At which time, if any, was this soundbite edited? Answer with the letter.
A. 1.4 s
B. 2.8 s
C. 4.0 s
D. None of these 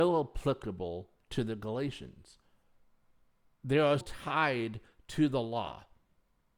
C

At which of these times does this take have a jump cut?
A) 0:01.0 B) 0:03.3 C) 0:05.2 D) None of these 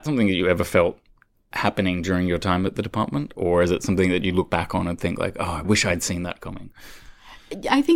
D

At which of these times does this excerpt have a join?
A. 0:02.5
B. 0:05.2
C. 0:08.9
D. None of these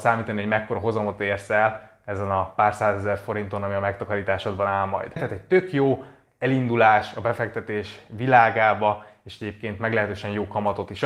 B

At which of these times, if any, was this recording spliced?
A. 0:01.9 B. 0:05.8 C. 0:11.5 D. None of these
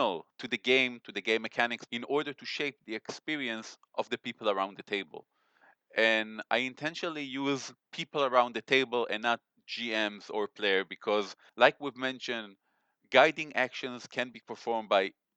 A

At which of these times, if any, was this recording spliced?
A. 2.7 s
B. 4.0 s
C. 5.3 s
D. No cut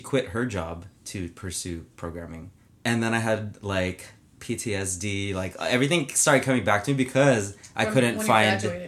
A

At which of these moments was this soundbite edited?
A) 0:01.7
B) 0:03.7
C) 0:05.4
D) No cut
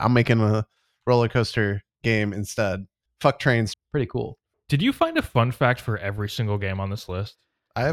B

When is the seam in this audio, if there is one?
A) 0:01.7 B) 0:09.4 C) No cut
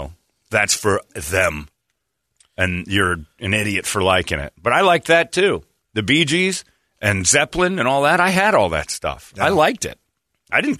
C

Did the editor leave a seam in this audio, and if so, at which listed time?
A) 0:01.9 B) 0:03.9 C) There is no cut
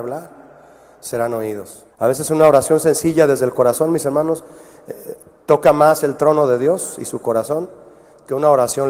A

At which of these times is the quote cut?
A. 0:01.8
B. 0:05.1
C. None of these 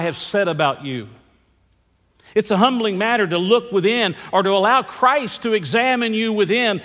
C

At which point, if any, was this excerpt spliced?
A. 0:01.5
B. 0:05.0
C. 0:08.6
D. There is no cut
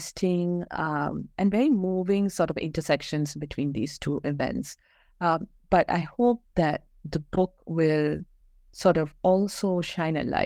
D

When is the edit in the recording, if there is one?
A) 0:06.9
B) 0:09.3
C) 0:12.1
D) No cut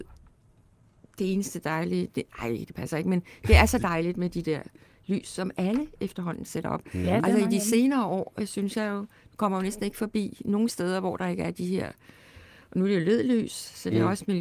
D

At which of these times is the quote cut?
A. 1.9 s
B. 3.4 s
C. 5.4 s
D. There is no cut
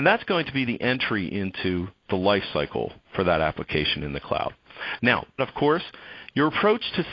C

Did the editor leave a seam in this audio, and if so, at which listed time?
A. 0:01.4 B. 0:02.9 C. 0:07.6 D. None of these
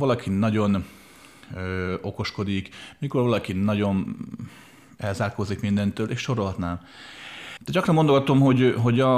C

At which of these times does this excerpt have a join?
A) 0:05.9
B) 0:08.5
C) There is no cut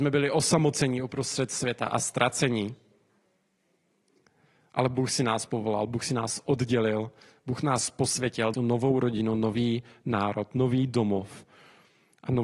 B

